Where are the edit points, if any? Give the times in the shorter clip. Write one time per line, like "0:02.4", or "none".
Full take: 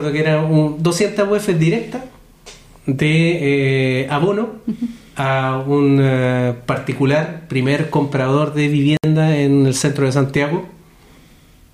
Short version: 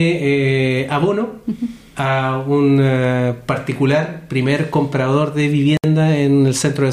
none